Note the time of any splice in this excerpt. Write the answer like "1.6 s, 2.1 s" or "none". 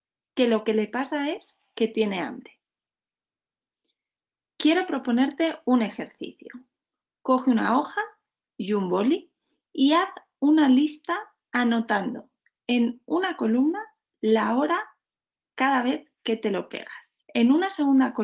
17.2 s